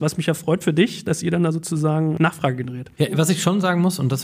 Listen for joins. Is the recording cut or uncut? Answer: uncut